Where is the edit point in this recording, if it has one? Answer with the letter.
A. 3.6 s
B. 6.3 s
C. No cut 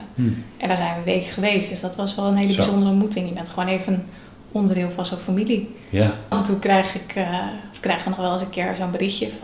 B